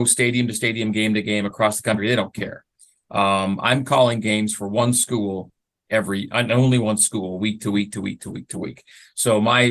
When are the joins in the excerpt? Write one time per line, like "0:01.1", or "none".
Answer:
none